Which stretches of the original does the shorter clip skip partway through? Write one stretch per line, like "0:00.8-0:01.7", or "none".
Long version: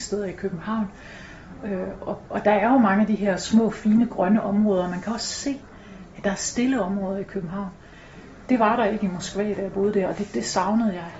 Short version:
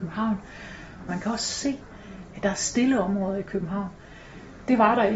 0:01.6-0:04.9